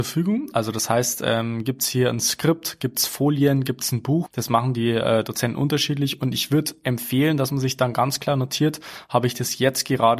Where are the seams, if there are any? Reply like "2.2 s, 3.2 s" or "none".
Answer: 4.3 s